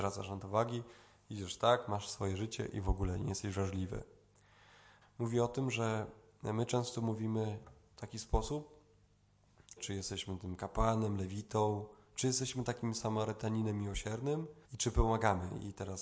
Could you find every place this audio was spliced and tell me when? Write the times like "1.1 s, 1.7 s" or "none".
5.0 s, 9.8 s, 14.6 s